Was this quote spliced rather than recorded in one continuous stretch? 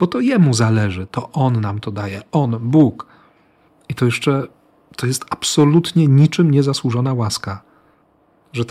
no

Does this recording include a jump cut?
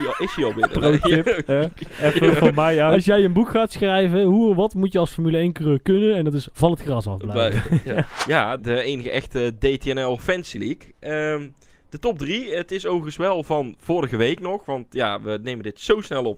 yes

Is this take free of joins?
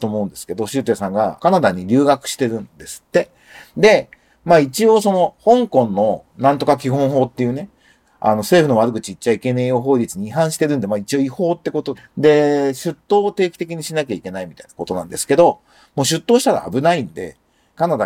no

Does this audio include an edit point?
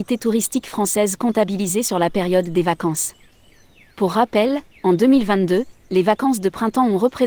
no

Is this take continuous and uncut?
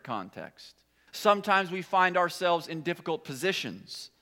no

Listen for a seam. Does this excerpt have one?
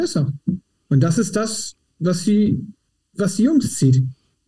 no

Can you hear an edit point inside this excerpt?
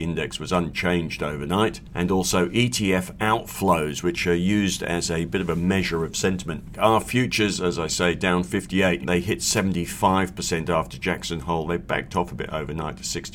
yes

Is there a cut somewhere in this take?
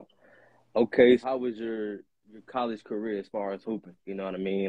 yes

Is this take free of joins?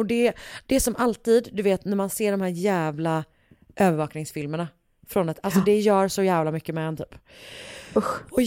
yes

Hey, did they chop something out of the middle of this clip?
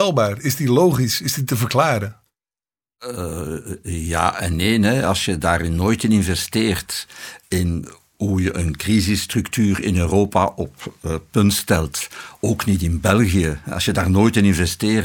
no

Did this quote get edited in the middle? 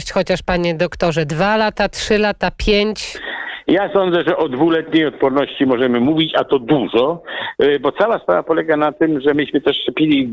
no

